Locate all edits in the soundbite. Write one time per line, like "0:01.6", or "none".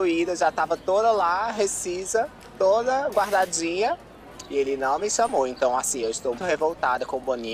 0:06.4